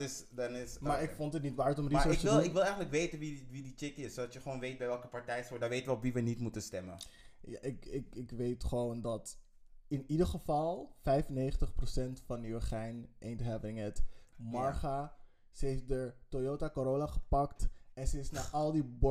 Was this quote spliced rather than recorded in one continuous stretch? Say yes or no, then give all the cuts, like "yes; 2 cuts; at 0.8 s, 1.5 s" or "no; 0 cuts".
no; 0 cuts